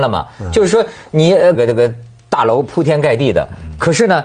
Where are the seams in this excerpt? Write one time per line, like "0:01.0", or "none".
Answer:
0:01.5